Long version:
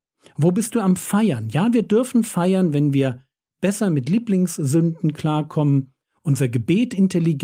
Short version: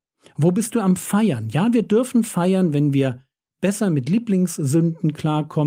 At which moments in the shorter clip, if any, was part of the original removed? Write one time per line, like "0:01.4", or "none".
none